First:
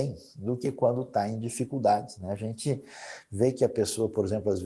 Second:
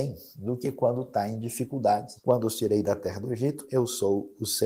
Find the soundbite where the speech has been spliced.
second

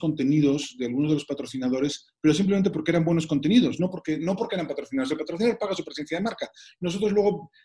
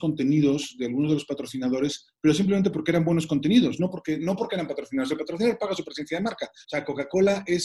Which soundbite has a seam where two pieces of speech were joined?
second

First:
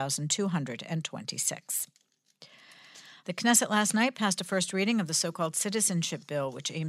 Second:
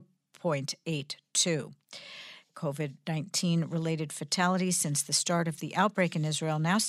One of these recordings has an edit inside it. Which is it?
first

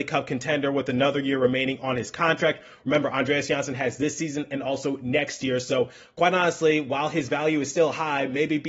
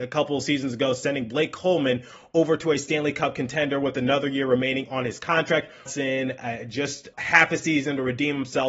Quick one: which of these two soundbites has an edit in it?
second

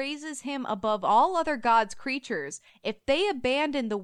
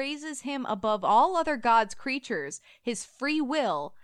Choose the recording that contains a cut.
first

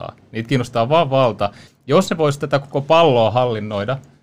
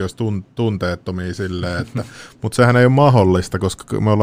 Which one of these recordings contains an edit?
first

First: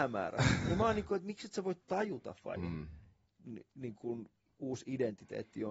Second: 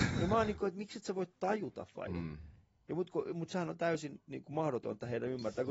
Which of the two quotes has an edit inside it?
first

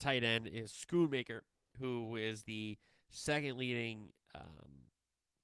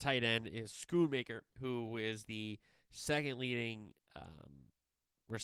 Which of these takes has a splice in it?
second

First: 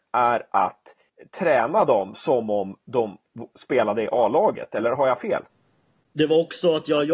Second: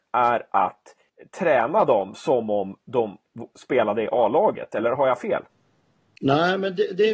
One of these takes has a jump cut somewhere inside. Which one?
first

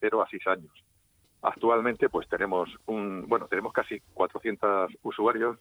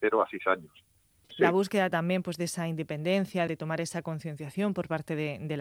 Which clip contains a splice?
second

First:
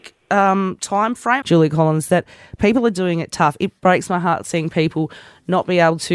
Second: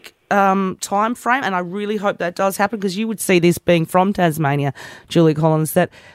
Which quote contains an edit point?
first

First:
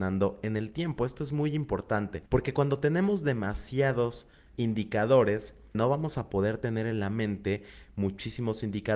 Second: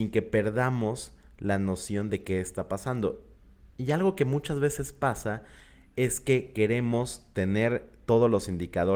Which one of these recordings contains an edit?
first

